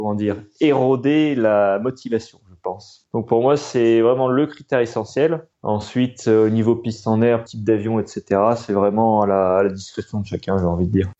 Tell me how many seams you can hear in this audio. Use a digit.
2